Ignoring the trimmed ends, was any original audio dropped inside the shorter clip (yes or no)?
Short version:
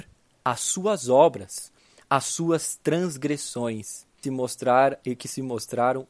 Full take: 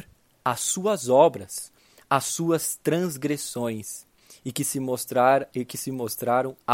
yes